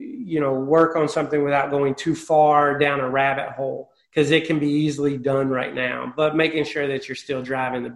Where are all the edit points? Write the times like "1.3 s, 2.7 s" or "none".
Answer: none